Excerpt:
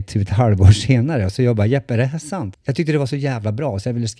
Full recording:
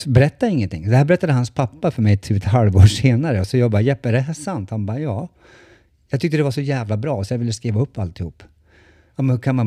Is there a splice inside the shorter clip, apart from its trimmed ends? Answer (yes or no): yes